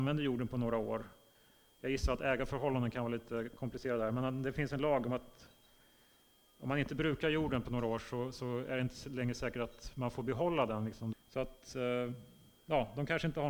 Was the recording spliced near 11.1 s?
yes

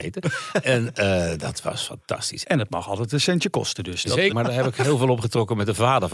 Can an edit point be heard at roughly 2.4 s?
yes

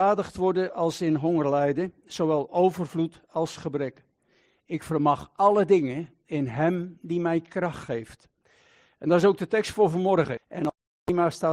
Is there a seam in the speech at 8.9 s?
no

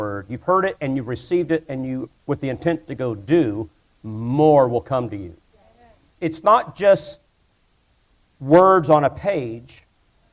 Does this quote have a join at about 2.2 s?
yes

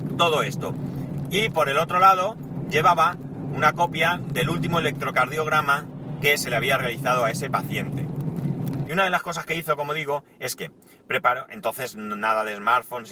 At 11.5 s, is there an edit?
no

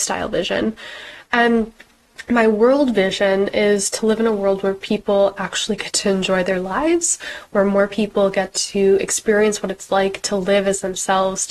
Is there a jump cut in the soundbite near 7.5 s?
no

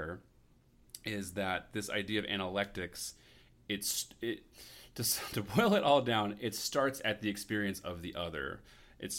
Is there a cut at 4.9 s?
no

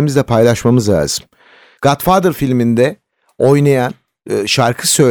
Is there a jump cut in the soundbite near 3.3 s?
no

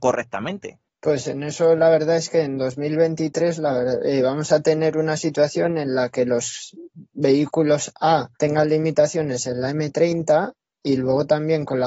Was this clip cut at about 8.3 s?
yes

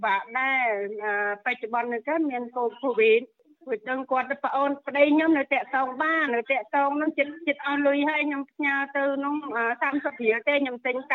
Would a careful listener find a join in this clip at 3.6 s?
no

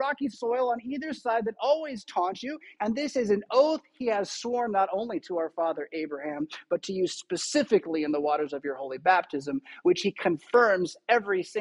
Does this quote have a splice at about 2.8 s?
yes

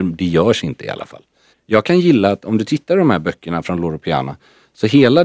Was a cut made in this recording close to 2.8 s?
no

